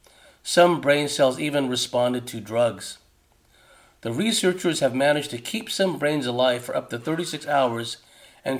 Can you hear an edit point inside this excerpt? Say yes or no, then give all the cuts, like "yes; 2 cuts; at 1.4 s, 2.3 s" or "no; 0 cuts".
no; 0 cuts